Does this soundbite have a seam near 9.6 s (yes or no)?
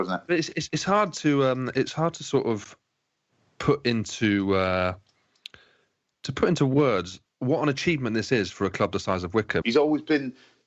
yes